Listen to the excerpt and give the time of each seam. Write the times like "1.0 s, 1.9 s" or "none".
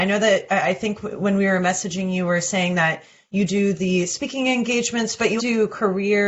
5.4 s

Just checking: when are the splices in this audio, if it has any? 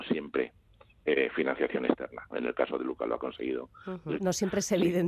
2.3 s, 4.2 s

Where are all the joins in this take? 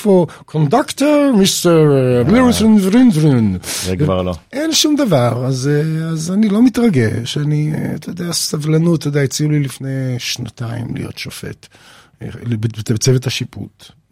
none

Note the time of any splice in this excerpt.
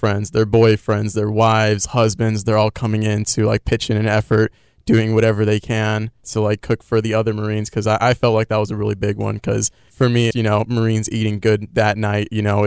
10.3 s

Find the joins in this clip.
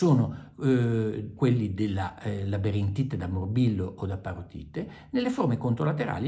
1.4 s

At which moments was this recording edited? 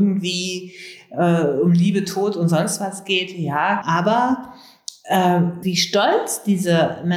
3.8 s, 5.6 s

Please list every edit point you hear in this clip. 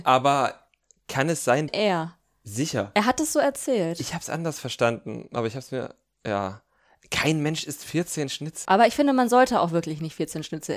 1.7 s, 8.6 s

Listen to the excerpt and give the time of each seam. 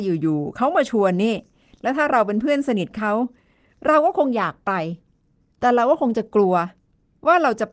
none

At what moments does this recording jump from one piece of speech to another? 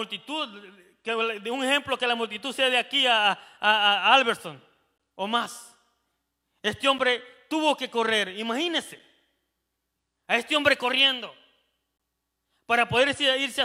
none

